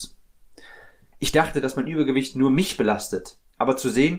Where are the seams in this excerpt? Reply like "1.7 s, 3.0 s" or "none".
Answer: 1.1 s